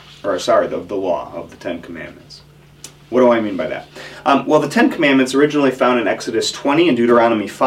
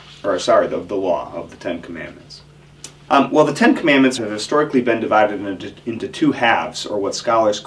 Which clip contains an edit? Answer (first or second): second